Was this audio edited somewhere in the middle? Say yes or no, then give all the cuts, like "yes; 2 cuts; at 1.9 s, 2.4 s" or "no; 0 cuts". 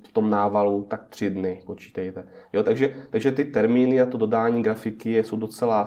no; 0 cuts